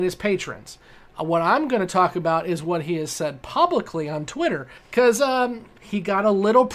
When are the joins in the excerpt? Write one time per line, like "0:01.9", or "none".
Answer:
0:05.8